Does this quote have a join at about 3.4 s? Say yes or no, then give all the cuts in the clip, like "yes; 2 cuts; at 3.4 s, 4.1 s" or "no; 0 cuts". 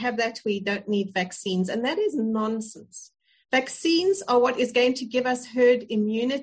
yes; 1 cut; at 3.4 s